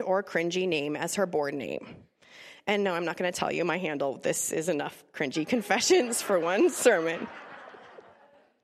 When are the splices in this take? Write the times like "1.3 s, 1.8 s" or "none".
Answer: none